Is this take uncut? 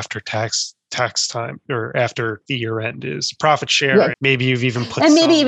no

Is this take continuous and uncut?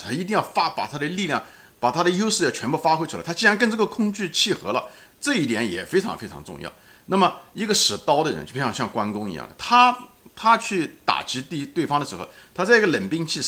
no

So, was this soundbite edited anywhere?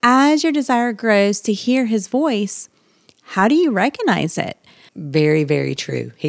yes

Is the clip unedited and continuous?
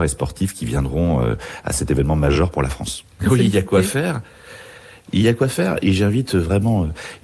no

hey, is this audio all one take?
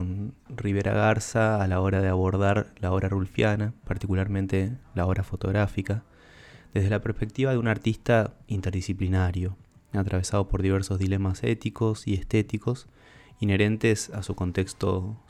yes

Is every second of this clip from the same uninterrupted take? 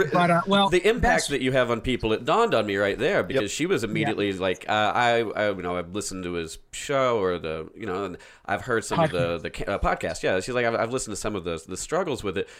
yes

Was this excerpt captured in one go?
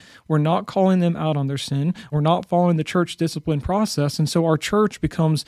no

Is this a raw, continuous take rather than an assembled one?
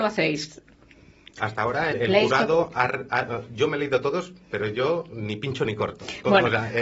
no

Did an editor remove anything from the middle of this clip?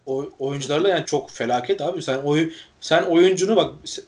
yes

